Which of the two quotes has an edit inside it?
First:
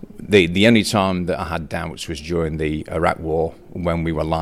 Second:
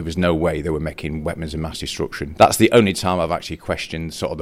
second; 1 cut; at 2.4 s

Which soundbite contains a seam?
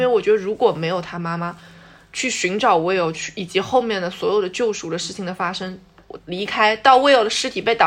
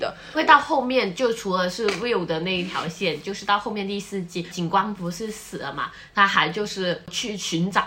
first; 2 cuts; at 3.1 s, 6.2 s

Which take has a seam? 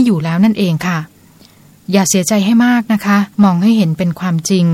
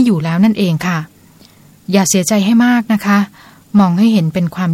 first; 1 cut; at 3.3 s

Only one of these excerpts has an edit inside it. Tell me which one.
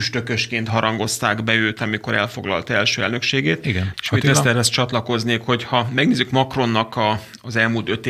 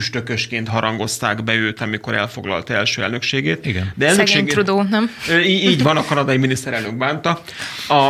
first; 1 cut; at 3.9 s

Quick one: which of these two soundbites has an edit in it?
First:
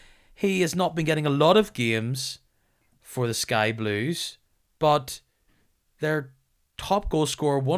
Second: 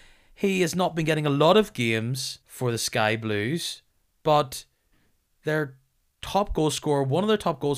second; 1 cut; at 2.4 s

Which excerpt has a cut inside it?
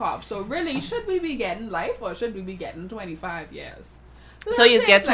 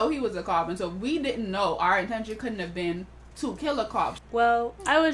second; 1 cut; at 4.2 s

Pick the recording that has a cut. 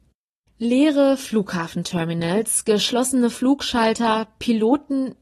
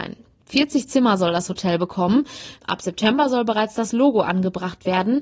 second; 1 cut; at 2.6 s

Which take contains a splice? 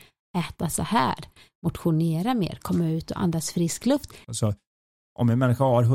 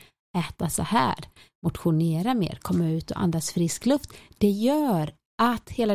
first; 1 cut; at 4.2 s

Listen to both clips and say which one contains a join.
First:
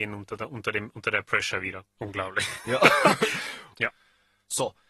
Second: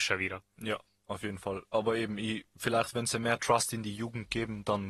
first; 2 cuts; at 2.0 s, 3.7 s

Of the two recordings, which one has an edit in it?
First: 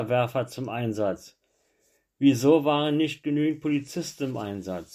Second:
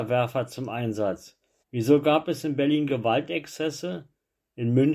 second; 1 cut; at 1.6 s

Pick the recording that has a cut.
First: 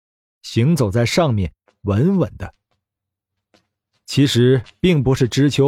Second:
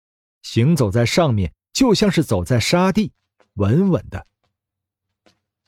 first; 1 cut; at 1.7 s

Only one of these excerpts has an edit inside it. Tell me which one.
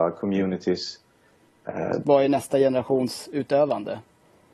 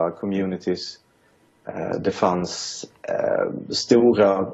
first; 1 cut; at 2.0 s

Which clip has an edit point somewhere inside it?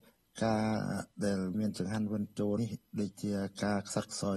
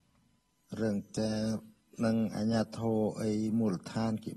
first; 1 cut; at 2.6 s

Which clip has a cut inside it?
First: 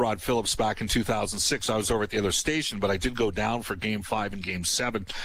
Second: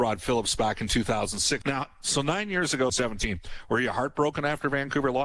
second; 2 cuts; at 1.6 s, 2.9 s

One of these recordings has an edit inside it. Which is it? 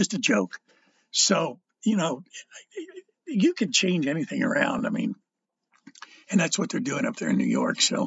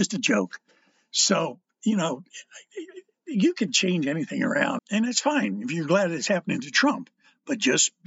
second; 1 cut; at 4.8 s

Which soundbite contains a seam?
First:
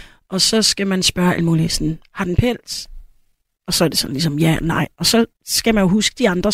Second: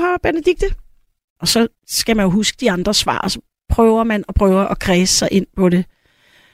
second; 1 cut; at 1.4 s

